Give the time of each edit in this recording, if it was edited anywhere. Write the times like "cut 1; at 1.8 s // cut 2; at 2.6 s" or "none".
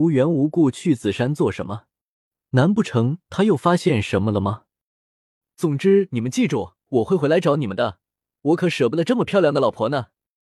none